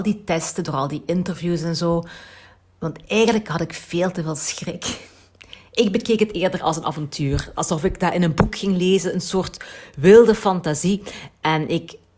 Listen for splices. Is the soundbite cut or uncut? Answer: uncut